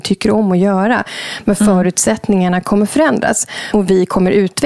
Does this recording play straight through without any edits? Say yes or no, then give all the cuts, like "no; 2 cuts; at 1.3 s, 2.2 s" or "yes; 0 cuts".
yes; 0 cuts